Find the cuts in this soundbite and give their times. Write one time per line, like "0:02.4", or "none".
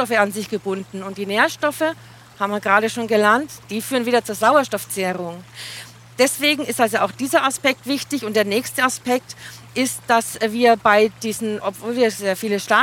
0:11.6